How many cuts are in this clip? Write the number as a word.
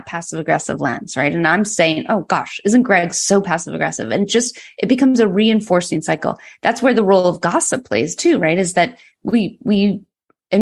zero